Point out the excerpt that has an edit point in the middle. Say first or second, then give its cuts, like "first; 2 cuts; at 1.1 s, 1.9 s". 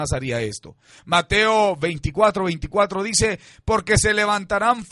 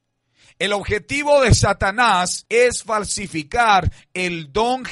second; 1 cut; at 2.5 s